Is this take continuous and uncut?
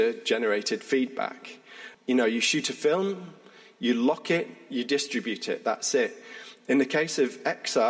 no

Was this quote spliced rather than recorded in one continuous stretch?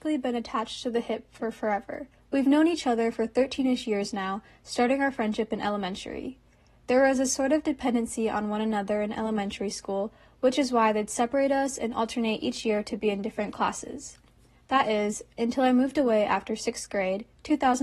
yes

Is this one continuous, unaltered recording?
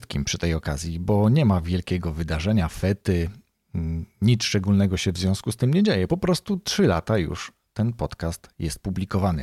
yes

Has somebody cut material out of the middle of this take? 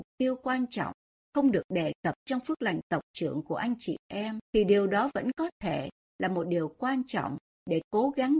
yes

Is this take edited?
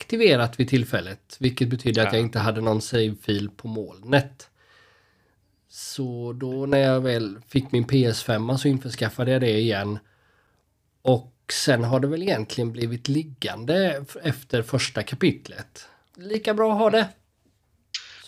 yes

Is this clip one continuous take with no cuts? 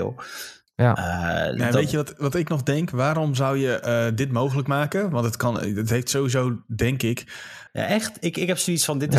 no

